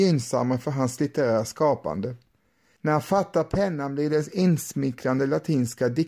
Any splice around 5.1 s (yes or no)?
no